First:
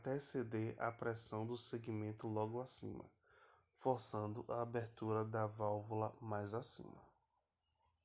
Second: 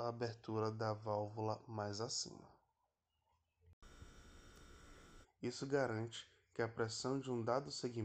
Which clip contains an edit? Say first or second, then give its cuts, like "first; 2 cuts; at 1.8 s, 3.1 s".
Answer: second; 1 cut; at 5.2 s